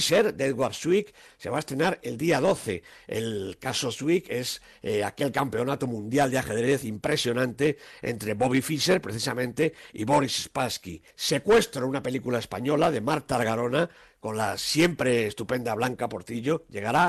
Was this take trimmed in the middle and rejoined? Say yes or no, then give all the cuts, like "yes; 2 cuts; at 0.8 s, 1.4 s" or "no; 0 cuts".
yes; 1 cut; at 11.1 s